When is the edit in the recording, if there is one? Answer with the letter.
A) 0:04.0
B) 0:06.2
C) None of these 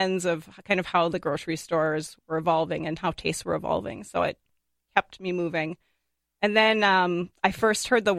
C